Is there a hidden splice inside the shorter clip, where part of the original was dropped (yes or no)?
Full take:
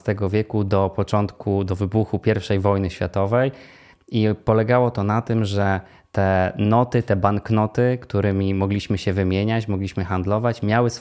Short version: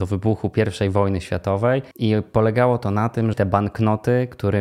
yes